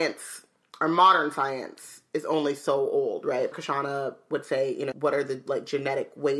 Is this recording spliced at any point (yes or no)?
yes